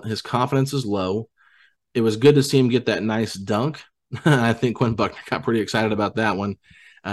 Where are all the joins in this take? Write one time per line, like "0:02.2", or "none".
none